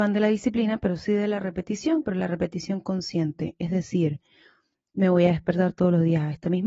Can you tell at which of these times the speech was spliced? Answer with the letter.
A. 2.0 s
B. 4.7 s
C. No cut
A